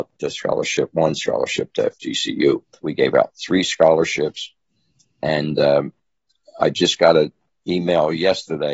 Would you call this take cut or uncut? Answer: cut